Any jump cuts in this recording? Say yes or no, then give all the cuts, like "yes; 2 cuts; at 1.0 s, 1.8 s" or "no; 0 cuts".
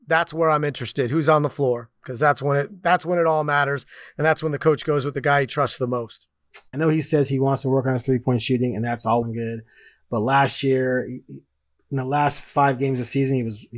yes; 2 cuts; at 6.7 s, 9.2 s